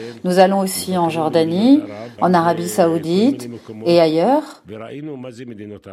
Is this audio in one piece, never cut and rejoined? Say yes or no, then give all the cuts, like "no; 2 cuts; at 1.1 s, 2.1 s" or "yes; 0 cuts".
no; 1 cut; at 2.2 s